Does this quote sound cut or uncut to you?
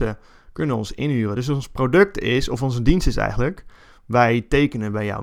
uncut